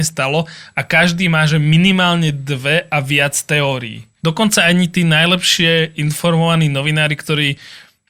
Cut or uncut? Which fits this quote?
cut